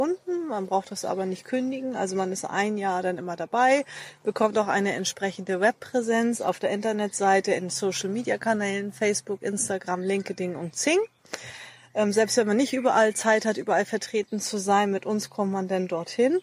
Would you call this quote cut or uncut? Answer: uncut